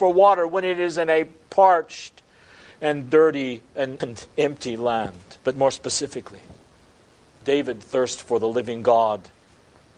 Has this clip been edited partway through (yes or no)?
yes